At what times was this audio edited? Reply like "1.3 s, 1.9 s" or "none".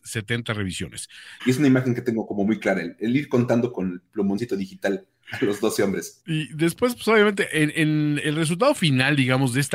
1.4 s